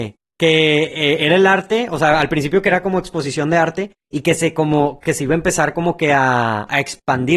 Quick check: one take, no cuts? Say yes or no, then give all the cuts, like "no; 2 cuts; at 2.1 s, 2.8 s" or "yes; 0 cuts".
yes; 0 cuts